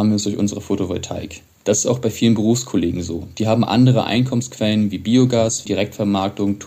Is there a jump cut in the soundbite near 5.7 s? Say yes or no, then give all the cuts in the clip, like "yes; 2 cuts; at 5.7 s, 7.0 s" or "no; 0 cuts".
yes; 1 cut; at 5.7 s